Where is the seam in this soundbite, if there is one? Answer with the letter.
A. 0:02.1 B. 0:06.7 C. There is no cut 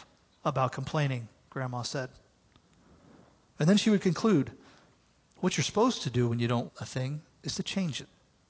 B